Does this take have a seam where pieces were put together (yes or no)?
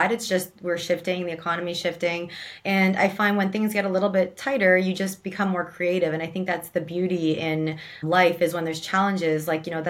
yes